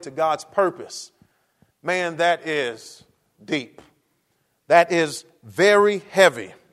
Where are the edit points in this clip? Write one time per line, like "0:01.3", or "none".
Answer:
0:01.7
0:04.5